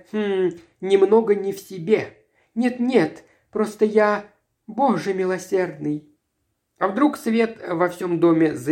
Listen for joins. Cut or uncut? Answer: uncut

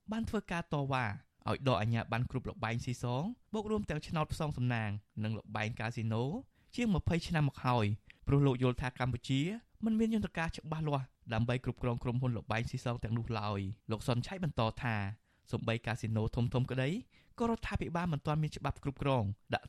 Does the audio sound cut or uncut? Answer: cut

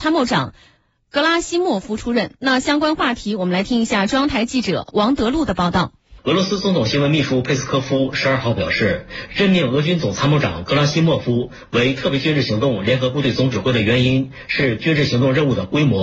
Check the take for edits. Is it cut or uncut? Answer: cut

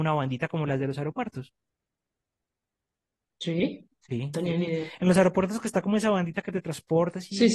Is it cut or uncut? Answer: cut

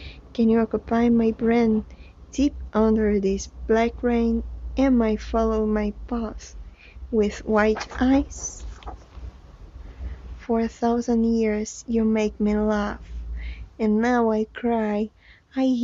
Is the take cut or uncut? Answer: uncut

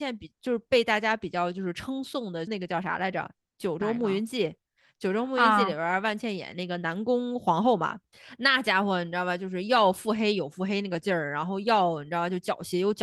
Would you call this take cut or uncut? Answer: cut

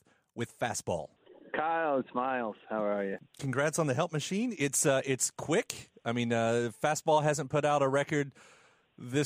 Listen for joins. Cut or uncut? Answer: uncut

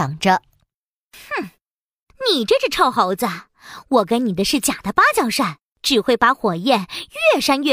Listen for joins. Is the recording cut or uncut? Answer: cut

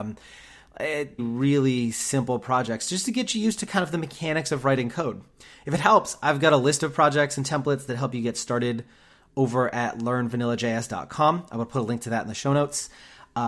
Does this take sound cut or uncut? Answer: cut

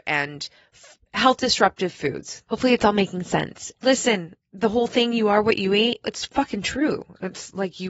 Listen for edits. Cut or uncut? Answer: cut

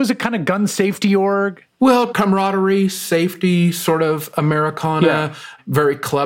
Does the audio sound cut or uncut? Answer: uncut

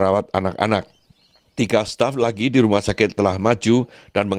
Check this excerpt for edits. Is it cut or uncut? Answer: uncut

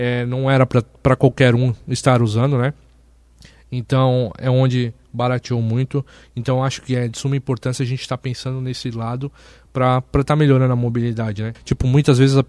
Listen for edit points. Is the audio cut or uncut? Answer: cut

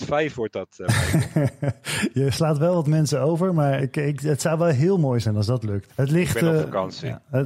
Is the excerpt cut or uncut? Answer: cut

